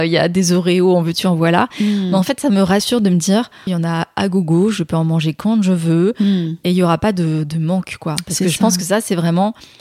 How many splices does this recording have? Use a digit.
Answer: 1